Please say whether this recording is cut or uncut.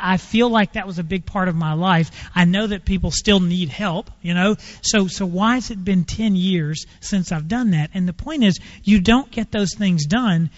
uncut